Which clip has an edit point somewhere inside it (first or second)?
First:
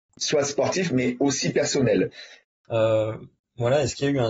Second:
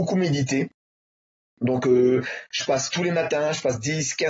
first